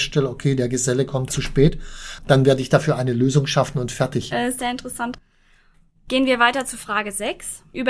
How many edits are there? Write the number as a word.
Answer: two